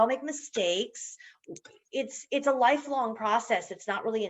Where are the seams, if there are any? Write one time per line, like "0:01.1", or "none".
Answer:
none

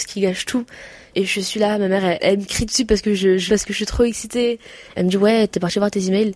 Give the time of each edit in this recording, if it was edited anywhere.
0:03.5
0:04.9

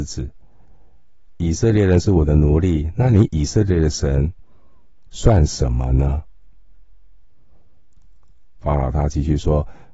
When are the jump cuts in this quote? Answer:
none

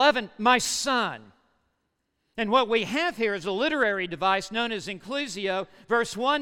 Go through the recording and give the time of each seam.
none

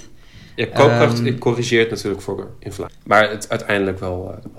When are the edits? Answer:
0:02.9

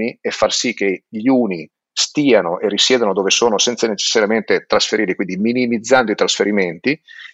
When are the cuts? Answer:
none

